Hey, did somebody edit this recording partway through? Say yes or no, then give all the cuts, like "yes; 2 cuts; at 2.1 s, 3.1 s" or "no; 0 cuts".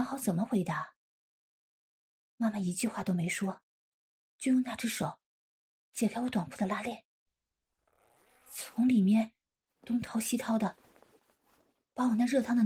no; 0 cuts